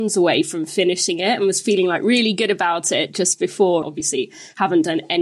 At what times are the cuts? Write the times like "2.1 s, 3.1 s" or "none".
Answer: 3.8 s